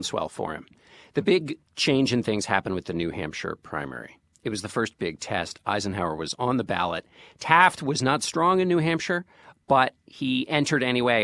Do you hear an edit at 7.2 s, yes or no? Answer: no